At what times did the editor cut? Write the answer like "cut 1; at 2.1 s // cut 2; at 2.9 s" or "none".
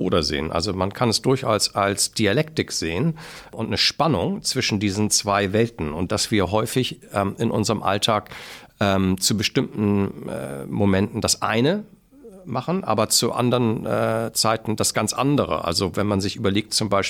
none